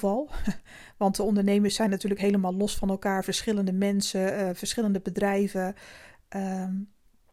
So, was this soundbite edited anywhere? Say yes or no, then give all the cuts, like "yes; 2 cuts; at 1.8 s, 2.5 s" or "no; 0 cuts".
no; 0 cuts